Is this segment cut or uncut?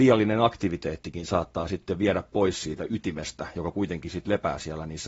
uncut